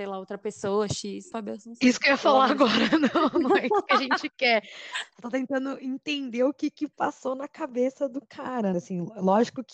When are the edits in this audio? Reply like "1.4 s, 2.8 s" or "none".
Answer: 1.3 s, 8.7 s